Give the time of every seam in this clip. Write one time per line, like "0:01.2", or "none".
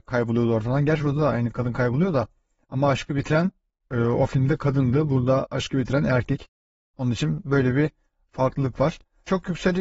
none

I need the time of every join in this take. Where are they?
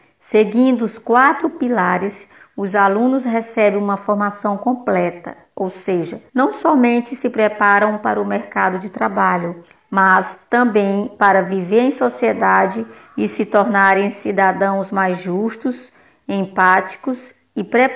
0:06.3

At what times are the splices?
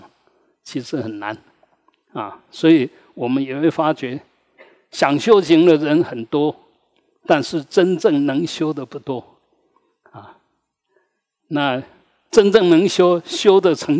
none

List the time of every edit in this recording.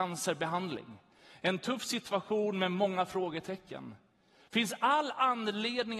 none

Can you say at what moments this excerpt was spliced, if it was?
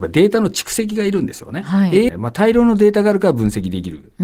0:02.1

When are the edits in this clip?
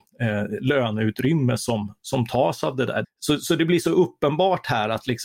0:03.0

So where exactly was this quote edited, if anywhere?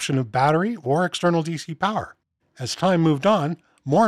0:02.4

